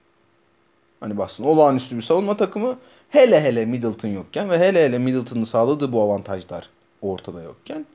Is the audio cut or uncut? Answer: uncut